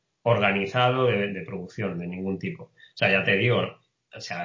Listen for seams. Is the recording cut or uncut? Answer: cut